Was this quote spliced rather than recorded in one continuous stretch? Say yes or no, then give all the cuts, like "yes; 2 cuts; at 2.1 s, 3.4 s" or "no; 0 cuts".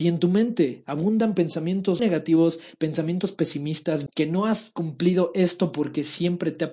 yes; 2 cuts; at 2.0 s, 4.1 s